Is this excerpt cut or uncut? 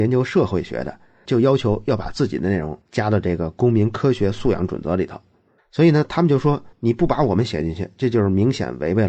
cut